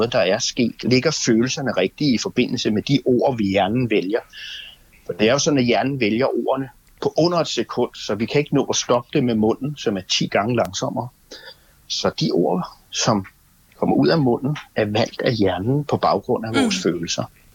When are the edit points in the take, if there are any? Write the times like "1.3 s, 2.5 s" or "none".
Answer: none